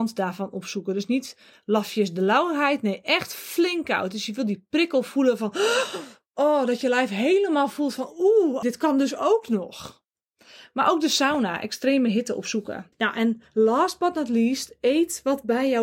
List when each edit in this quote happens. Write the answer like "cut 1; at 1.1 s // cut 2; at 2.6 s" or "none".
cut 1; at 8.6 s // cut 2; at 12.9 s